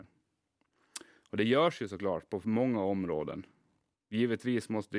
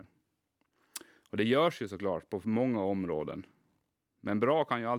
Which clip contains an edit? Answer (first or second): first